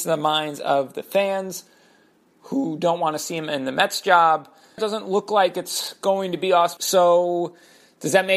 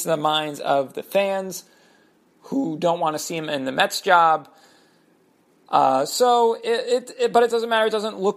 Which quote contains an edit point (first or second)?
first